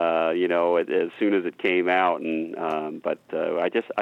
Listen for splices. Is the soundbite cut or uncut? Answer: uncut